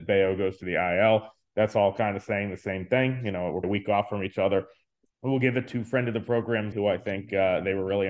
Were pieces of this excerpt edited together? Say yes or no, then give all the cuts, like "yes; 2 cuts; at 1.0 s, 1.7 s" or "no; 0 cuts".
yes; 3 cuts; at 3.6 s, 5.1 s, 6.7 s